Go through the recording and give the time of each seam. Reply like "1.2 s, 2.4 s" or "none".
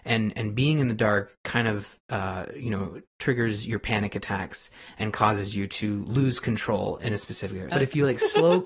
7.7 s